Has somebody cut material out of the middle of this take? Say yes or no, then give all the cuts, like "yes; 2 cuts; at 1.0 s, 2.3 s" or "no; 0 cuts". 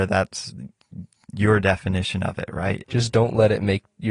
yes; 1 cut; at 2.8 s